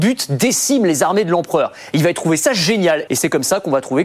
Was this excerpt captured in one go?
no; 2 cuts; at 1.9 s, 3.1 s

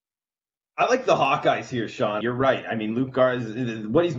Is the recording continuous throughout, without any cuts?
no; 1 cut; at 2.2 s

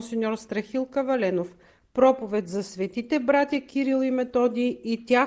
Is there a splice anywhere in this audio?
no; 0 cuts

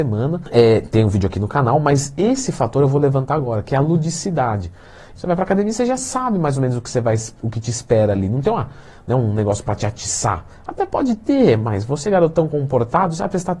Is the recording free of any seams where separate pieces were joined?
no; 1 cut; at 5.1 s

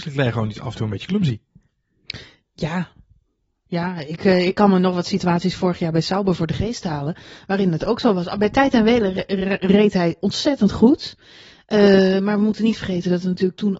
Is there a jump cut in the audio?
no; 0 cuts

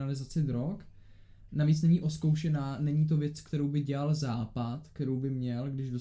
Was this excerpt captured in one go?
no; 1 cut; at 1.5 s

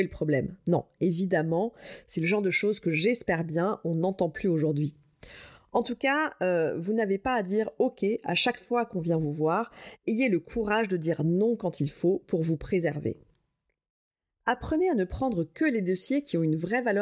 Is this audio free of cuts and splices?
yes; 0 cuts

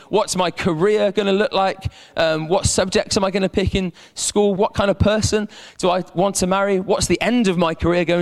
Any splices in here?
yes; 1 cut; at 4.6 s

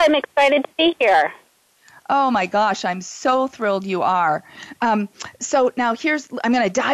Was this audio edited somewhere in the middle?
no; 0 cuts

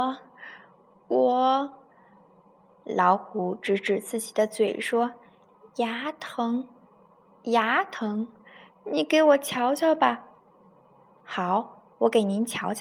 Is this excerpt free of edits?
yes; 0 cuts

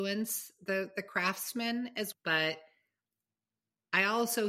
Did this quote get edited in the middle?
yes; 1 cut; at 2.1 s

